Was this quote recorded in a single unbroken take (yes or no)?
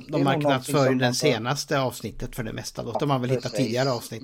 no